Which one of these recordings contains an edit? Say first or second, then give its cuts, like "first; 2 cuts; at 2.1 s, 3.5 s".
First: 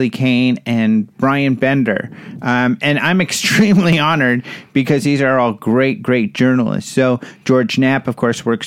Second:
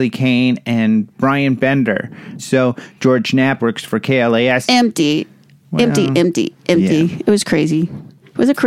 second; 3 cuts; at 2.4 s, 3.6 s, 4.6 s